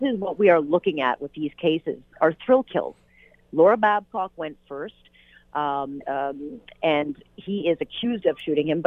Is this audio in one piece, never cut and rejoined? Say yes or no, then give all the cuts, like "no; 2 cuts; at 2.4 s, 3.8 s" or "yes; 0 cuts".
no; 1 cut; at 6.0 s